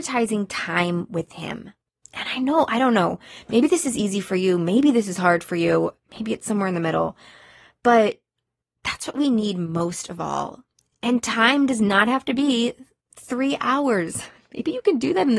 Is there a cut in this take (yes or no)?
no